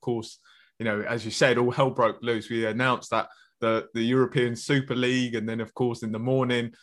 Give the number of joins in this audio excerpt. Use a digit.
0